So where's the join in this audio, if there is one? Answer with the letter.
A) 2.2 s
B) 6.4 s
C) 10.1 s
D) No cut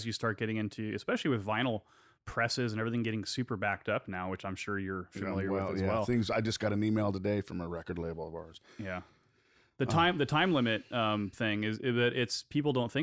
D